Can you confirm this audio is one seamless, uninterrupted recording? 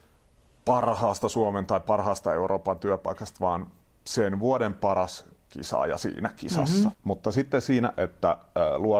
no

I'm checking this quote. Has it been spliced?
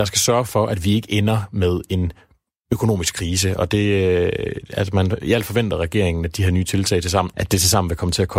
yes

